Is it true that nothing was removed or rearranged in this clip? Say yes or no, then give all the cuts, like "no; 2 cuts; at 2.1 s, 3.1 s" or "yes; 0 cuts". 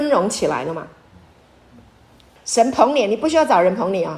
no; 1 cut; at 2.4 s